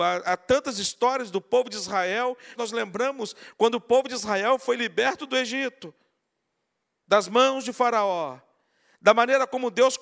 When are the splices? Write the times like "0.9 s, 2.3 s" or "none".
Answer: 2.6 s